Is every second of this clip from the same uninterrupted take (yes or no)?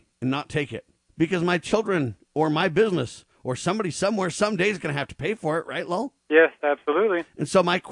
no